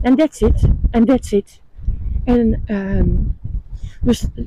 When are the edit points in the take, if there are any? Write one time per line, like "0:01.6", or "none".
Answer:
none